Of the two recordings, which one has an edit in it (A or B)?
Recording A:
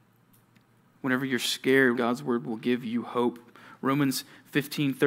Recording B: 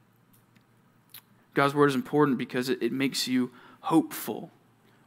A